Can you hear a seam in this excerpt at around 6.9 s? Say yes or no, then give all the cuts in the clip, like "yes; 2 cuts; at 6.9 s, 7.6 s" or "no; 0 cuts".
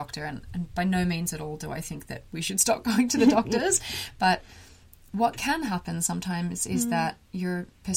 no; 0 cuts